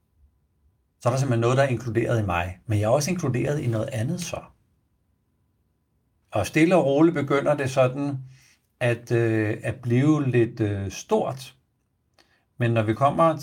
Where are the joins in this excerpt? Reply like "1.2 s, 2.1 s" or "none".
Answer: 6.2 s

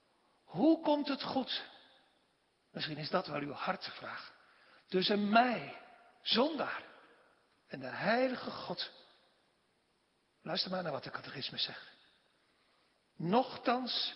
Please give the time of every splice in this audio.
none

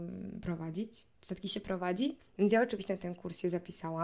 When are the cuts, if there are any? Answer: 2.2 s

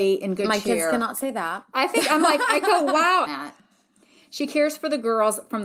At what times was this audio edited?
3.3 s

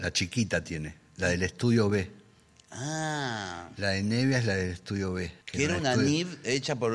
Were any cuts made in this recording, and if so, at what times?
5.4 s

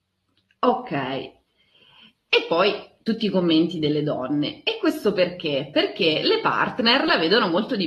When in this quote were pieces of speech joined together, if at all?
none

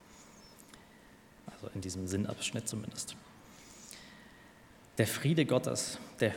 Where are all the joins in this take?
1.5 s

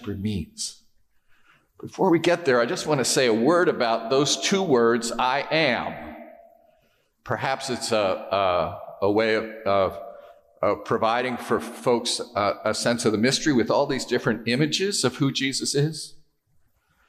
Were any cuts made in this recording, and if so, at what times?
7.2 s

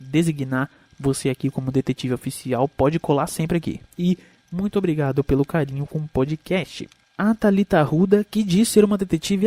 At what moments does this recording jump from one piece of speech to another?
3.8 s

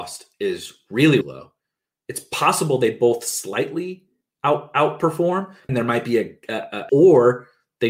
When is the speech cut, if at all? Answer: 1.2 s, 5.7 s, 6.9 s

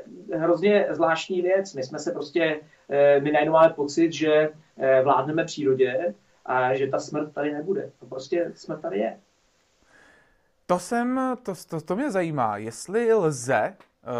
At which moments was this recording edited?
none

